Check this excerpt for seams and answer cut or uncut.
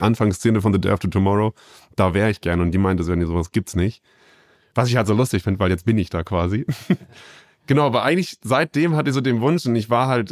uncut